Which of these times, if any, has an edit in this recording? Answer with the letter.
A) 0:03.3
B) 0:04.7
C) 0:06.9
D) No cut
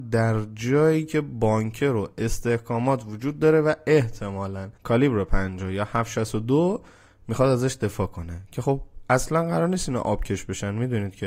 B